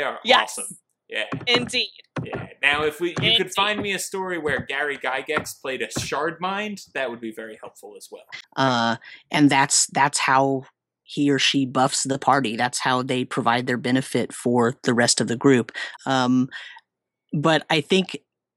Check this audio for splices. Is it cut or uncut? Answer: cut